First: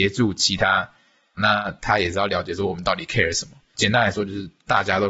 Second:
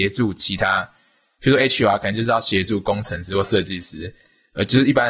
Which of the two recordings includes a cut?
first; 2 cuts; at 1.4 s, 3.7 s

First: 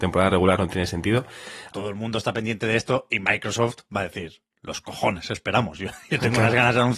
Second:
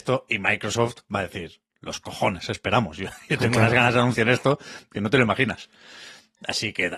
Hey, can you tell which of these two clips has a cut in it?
first; 1 cut; at 1.7 s

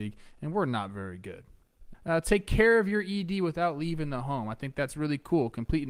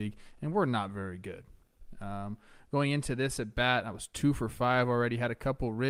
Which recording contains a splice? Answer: first; 1 cut; at 1.9 s

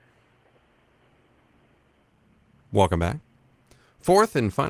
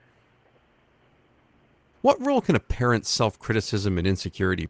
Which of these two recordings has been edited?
second; 1 cut; at 1.9 s

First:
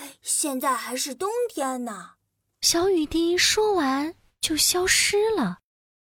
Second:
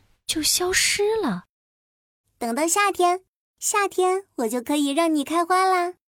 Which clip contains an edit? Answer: second; 1 cut; at 2.2 s

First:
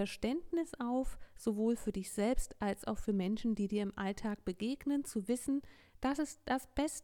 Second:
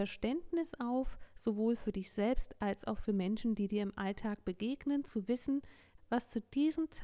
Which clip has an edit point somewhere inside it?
second; 1 cut; at 6.0 s

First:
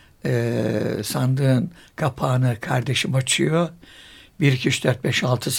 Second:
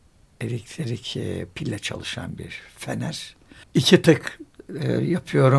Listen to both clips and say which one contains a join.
second; 1 cut; at 3.6 s

